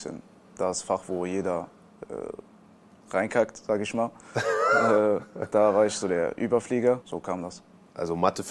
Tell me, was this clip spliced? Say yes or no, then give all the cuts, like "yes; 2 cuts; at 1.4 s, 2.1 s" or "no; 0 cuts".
yes; 1 cut; at 7.0 s